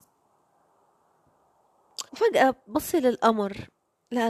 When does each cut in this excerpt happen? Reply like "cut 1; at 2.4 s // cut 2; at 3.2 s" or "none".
cut 1; at 2.1 s